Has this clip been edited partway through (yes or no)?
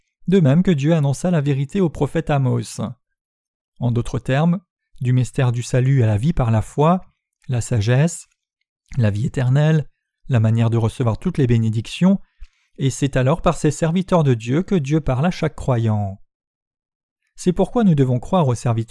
yes